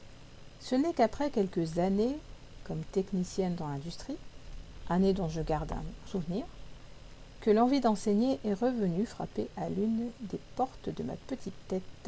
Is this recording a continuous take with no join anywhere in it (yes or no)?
no